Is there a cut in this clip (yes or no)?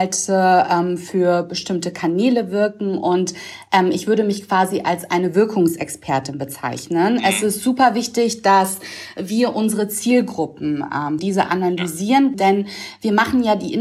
yes